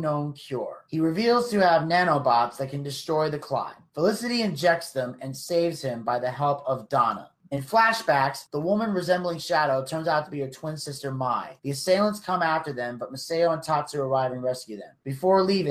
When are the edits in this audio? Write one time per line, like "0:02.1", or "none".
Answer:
none